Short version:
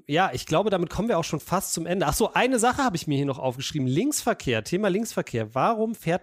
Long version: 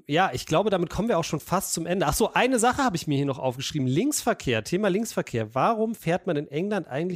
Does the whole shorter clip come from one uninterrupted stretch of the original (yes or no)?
yes